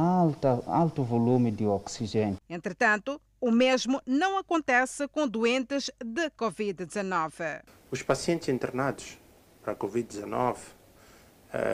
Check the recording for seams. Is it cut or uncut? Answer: cut